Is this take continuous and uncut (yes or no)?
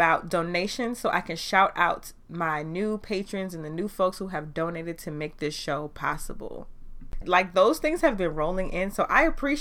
no